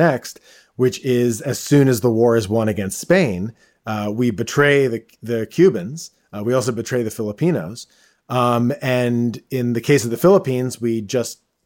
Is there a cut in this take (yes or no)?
no